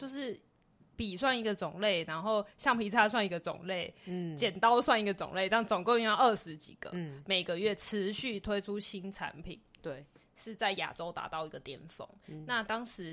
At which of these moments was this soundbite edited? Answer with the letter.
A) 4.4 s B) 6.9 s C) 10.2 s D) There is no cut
C